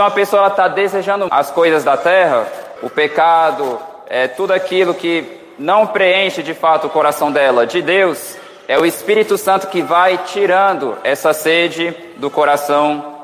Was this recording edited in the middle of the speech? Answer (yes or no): yes